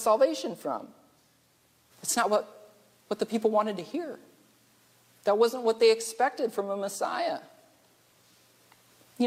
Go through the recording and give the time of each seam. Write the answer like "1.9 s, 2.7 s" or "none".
1.9 s